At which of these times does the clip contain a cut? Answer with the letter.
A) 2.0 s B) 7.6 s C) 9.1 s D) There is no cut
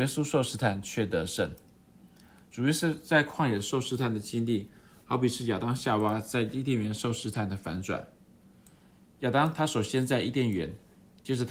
D